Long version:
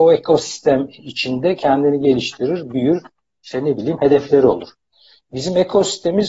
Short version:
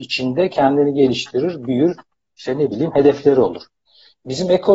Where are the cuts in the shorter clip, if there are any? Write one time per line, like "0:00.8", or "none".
none